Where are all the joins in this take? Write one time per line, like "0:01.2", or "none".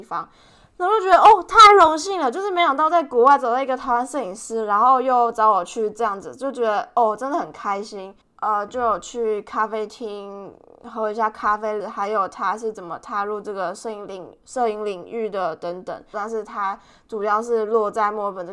0:08.2
0:11.8
0:16.1